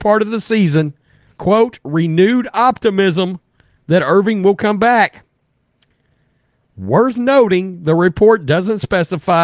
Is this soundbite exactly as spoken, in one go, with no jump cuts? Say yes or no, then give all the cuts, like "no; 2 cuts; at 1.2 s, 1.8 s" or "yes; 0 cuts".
no; 2 cuts; at 1.3 s, 6.6 s